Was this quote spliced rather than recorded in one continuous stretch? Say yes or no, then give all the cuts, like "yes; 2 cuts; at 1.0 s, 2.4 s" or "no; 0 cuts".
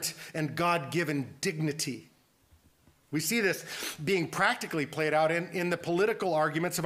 no; 0 cuts